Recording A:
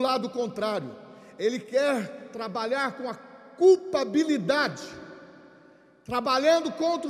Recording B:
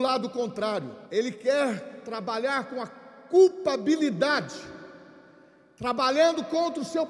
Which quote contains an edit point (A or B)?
B